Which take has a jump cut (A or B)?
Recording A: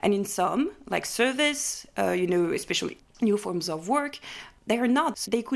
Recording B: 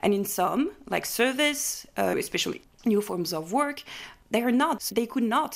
B